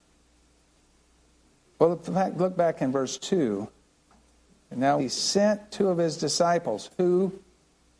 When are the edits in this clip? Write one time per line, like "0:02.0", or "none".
0:05.0